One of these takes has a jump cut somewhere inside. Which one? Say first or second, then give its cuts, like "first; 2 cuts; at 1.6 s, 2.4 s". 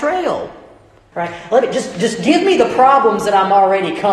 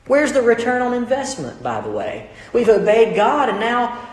first; 1 cut; at 1.1 s